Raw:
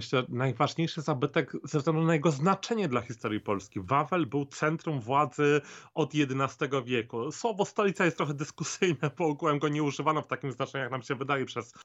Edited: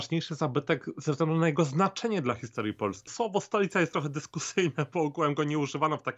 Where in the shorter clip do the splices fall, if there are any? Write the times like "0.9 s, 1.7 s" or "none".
3.1 s

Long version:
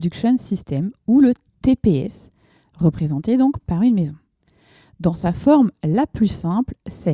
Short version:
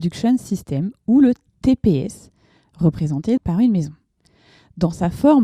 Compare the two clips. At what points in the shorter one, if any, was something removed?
3.4 s

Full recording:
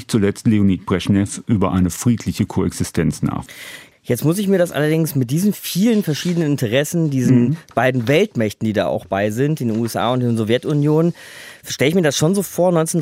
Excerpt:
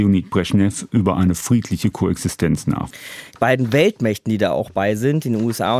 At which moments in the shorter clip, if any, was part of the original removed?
3.3 s

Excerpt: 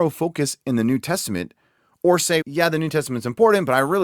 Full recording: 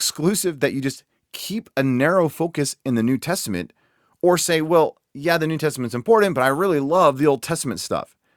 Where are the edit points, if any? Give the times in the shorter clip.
2.4 s

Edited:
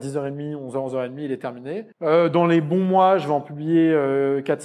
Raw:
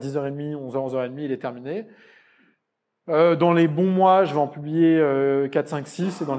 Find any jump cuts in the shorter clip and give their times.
1.9 s

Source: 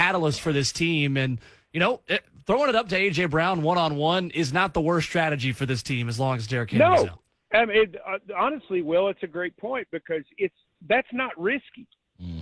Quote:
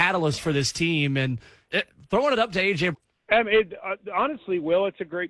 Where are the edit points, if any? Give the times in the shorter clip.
1.7 s, 2.9 s

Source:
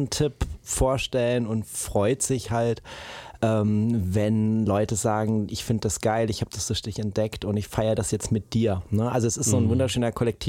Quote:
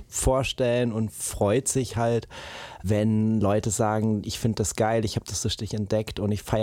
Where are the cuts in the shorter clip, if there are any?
2.8 s

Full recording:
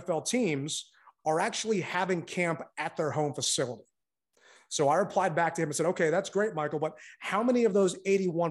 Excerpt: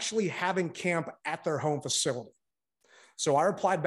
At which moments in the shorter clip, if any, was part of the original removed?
none

